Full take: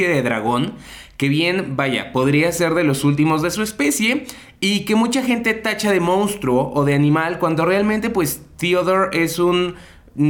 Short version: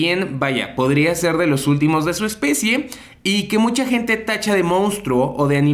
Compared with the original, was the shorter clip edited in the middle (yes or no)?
no